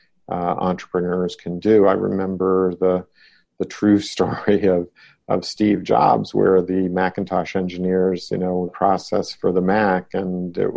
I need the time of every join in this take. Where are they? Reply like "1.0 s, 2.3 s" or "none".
8.7 s